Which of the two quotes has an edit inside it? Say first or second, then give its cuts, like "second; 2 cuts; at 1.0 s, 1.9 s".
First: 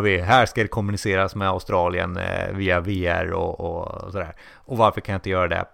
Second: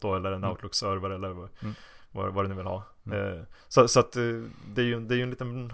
second; 1 cut; at 3.6 s